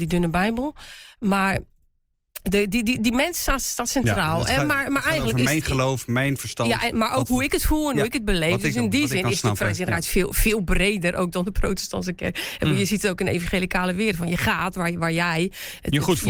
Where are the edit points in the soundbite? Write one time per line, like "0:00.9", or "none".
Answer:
none